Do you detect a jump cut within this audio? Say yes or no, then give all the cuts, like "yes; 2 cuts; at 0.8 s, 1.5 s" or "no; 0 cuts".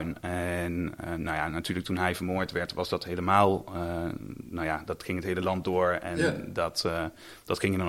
no; 0 cuts